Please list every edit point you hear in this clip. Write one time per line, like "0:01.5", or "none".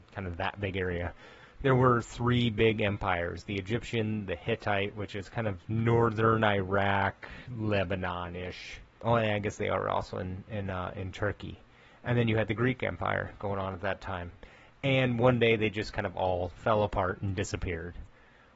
none